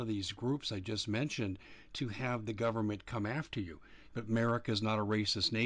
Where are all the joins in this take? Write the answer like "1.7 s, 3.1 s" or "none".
4.1 s